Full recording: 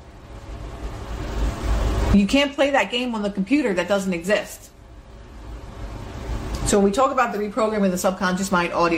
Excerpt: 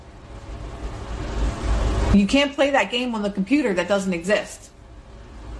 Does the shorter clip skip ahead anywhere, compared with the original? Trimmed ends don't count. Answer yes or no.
no